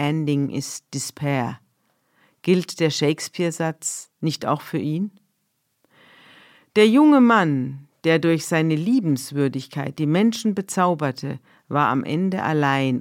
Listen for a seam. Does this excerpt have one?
no; 0 cuts

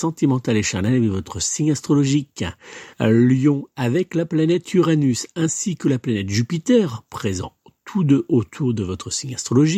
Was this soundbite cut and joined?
yes; 1 cut; at 2.9 s

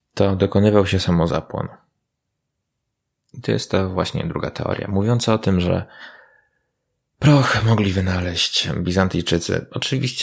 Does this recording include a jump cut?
no; 0 cuts

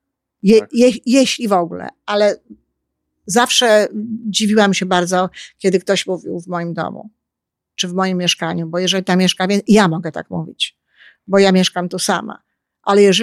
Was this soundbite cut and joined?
no; 0 cuts

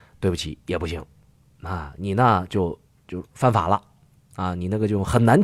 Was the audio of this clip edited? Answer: no; 0 cuts

